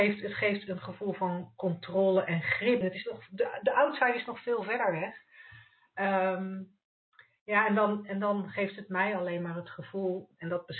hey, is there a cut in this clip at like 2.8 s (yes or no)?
yes